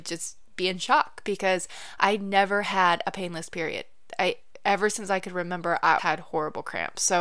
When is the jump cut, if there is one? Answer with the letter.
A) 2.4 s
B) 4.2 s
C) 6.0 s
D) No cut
C